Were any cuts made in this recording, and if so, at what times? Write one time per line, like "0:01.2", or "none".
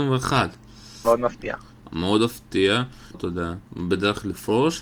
0:01.0
0:03.1